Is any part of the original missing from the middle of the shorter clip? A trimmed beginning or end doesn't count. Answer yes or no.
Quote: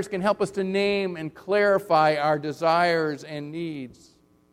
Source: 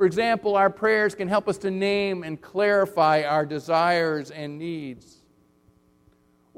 no